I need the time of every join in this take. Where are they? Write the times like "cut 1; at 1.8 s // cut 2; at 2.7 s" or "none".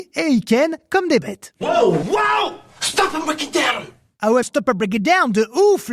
cut 1; at 2.0 s // cut 2; at 4.4 s